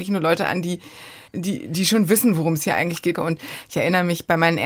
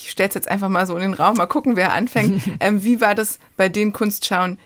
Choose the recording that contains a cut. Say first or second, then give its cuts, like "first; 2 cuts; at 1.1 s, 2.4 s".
first; 2 cuts; at 1.3 s, 3.1 s